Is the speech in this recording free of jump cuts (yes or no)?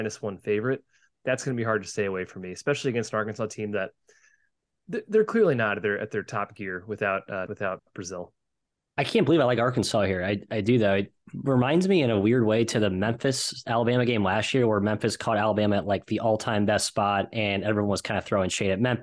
no